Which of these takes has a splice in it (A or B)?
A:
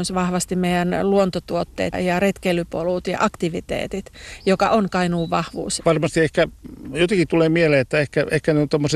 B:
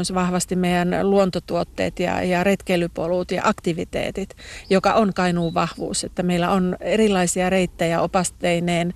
A